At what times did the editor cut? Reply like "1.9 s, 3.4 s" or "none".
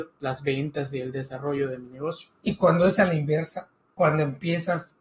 none

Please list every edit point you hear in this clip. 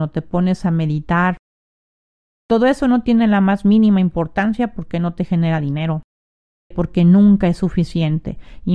6.7 s

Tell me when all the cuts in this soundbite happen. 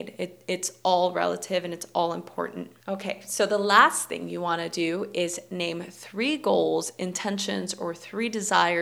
2.8 s

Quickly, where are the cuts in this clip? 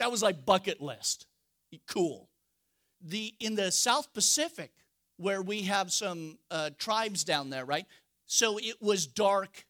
2.9 s, 8.2 s

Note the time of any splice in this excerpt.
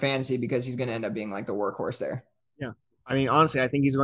none

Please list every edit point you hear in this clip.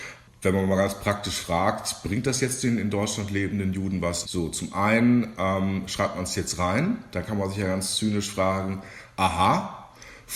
4.2 s

